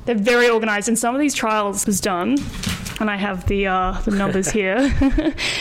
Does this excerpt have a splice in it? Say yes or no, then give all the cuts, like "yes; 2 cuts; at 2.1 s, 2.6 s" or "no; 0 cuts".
yes; 1 cut; at 1.8 s